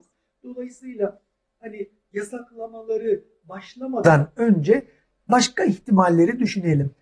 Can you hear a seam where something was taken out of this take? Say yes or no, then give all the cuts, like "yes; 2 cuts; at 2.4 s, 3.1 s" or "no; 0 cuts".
no; 0 cuts